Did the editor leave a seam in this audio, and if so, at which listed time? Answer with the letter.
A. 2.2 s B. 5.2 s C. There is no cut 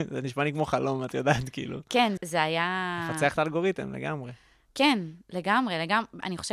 A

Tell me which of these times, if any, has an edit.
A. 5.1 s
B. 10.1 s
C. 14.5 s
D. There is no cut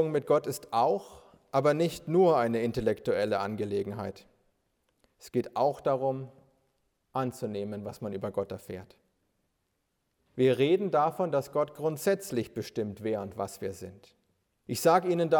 B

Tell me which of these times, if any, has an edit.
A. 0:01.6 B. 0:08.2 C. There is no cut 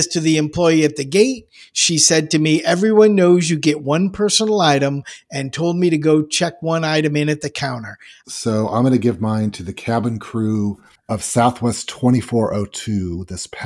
B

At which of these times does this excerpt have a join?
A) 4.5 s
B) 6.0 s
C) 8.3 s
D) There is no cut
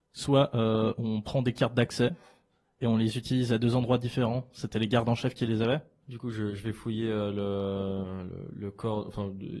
B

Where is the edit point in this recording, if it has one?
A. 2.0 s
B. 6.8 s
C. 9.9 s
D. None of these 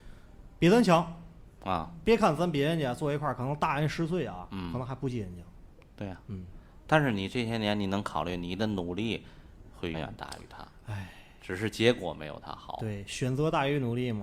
C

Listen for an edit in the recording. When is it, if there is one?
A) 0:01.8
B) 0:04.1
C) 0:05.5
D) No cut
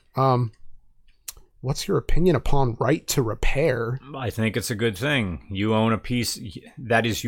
D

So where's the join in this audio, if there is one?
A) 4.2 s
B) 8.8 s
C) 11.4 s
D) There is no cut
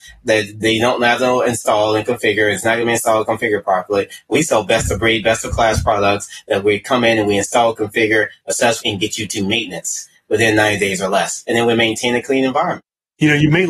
B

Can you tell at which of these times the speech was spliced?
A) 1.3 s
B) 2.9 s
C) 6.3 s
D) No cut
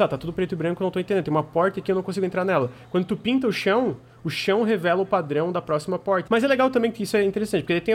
C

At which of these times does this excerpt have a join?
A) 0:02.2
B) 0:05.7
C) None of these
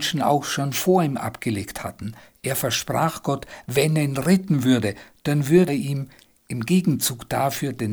B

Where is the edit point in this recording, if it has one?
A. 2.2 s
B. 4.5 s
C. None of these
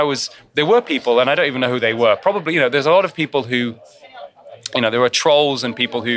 C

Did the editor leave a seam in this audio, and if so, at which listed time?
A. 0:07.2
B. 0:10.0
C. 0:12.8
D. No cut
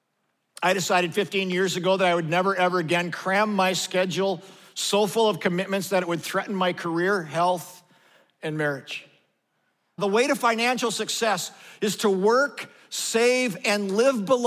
B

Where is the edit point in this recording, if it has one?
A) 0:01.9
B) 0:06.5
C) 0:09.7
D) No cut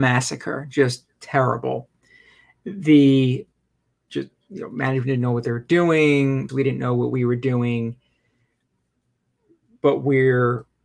B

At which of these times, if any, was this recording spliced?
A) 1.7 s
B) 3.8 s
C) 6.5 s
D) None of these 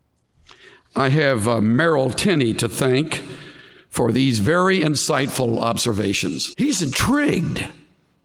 C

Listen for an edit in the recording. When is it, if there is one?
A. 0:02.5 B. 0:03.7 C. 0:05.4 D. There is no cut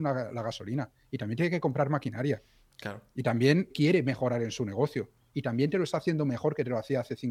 B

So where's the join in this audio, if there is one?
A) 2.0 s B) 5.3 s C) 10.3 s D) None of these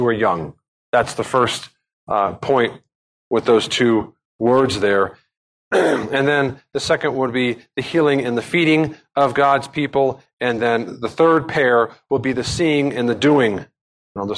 D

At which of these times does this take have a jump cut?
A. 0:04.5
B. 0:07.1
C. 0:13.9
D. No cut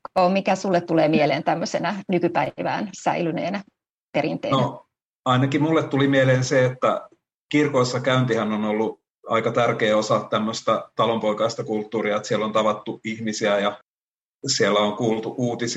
D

